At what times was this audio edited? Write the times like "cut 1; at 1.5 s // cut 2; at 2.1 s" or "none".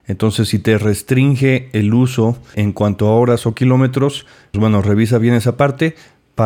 cut 1; at 2.5 s // cut 2; at 4.5 s